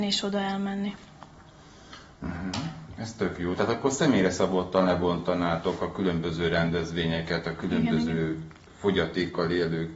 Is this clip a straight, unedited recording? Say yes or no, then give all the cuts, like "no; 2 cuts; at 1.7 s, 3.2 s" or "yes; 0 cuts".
yes; 0 cuts